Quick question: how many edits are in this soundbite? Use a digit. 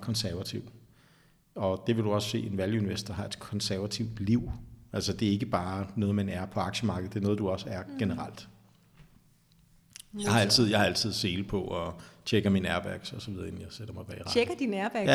0